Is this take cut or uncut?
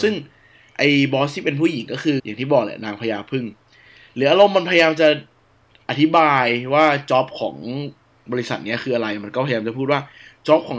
cut